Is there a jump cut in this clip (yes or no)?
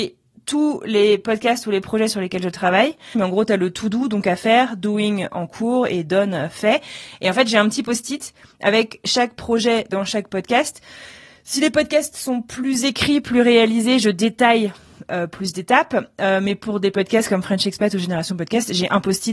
no